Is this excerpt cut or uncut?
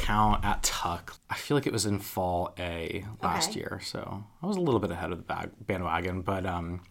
cut